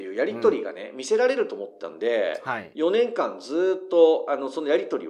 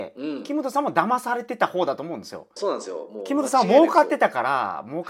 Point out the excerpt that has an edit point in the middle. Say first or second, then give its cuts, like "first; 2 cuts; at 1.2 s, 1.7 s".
second; 1 cut; at 2.6 s